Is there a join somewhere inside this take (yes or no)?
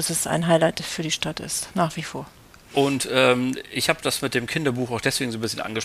no